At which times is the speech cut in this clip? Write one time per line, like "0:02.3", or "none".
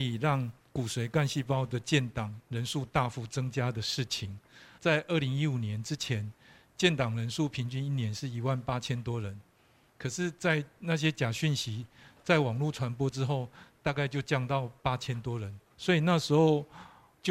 0:15.7